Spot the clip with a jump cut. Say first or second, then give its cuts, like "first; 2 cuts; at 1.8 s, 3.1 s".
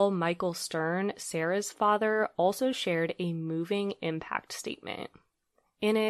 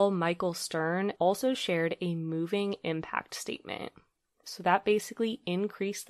second; 2 cuts; at 1.1 s, 4.4 s